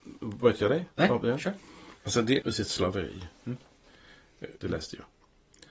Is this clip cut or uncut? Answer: cut